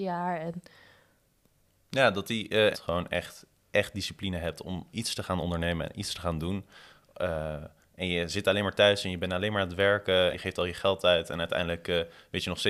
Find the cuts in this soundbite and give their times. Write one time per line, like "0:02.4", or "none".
0:02.7
0:10.3

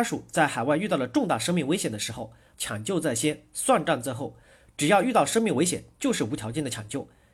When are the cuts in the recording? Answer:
0:02.5

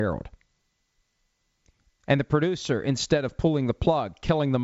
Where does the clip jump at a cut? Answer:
0:01.9

